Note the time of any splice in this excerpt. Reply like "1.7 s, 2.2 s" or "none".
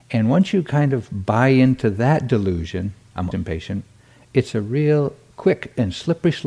3.3 s